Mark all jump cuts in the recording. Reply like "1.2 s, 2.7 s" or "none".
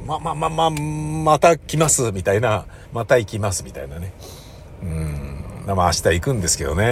2.8 s